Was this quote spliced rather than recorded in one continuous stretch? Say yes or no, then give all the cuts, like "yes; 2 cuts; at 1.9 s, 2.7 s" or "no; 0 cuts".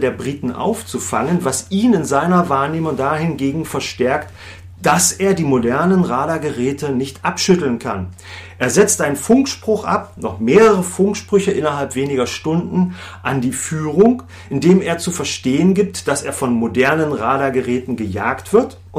no; 0 cuts